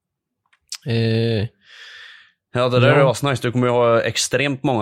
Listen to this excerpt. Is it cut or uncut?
uncut